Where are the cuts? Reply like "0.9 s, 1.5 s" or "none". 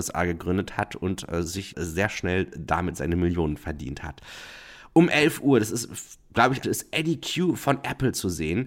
1.7 s, 6.6 s